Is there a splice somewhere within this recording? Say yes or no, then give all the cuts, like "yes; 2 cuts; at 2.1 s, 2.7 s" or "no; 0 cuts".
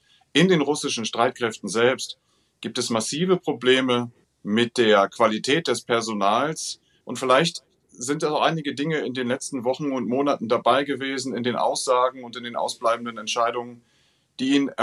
yes; 1 cut; at 7.0 s